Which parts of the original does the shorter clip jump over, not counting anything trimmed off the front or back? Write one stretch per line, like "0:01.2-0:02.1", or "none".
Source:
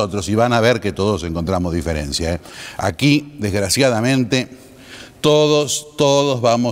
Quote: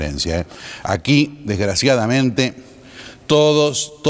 none